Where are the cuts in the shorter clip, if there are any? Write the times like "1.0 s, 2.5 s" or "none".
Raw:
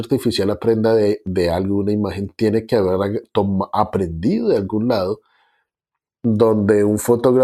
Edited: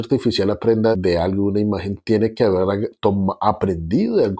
0.9 s